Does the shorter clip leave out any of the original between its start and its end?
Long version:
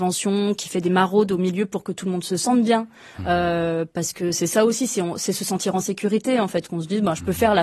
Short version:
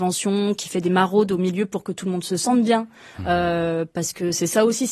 no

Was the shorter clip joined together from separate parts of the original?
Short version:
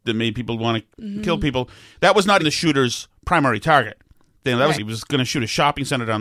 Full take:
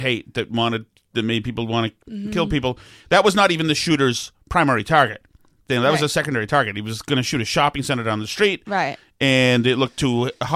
yes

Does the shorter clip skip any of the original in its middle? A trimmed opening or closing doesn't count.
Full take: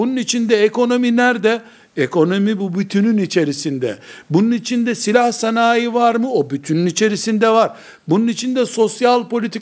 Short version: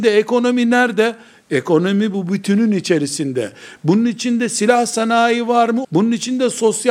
yes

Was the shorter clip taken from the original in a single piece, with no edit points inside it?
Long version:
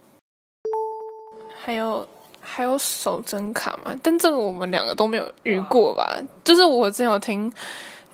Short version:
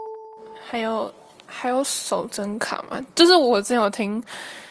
no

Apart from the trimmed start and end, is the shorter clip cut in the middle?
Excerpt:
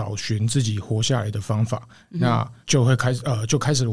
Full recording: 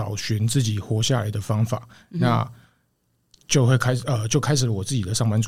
yes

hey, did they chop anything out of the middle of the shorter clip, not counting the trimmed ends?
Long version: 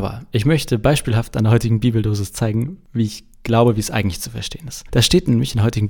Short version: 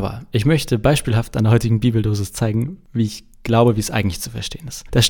no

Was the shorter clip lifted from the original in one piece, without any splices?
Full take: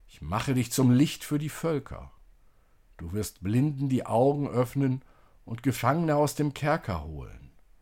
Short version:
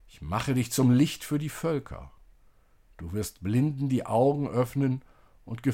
yes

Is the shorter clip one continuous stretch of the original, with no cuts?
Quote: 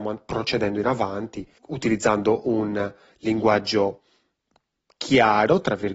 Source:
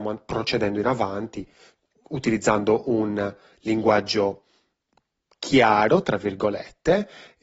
no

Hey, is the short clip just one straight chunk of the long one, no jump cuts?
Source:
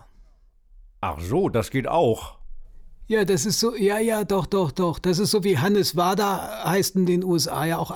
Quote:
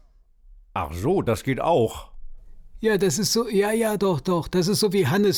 no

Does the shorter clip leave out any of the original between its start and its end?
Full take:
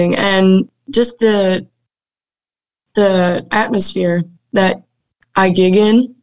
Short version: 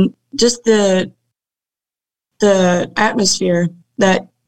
no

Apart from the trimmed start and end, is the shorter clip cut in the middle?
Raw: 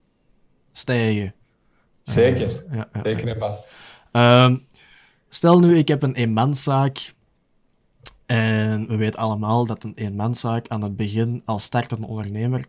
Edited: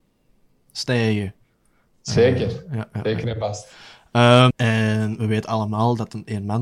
yes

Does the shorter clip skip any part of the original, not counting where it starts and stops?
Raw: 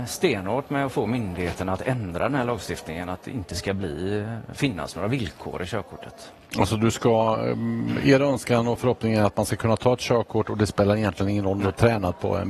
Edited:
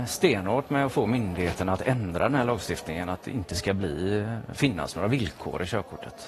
no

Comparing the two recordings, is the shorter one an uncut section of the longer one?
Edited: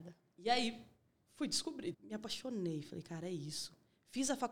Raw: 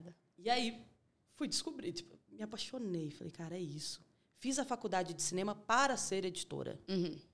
no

